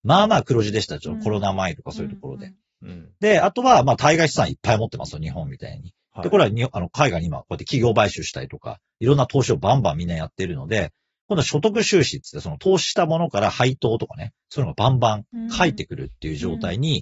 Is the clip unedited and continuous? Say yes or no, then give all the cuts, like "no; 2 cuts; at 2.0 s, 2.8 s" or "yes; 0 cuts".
yes; 0 cuts